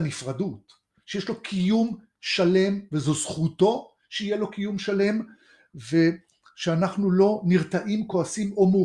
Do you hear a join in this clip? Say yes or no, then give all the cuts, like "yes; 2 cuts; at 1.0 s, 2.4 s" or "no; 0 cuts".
no; 0 cuts